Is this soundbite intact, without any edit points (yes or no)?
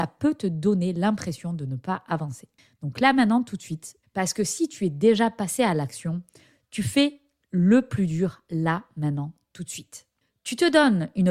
no